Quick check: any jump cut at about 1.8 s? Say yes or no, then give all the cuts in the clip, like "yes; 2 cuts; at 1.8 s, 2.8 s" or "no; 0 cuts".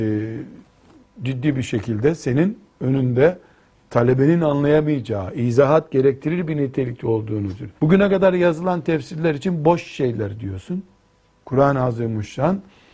no; 2 cuts; at 7.8 s, 11.4 s